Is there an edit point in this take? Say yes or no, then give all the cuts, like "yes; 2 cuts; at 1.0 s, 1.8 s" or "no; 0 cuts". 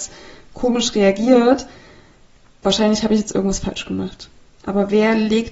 yes; 1 cut; at 4.5 s